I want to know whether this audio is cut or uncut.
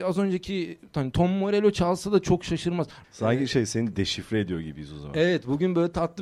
cut